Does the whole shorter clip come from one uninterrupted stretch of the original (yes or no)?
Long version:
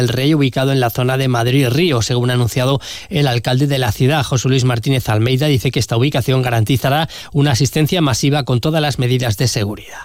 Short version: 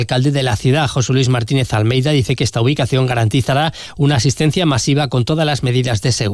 yes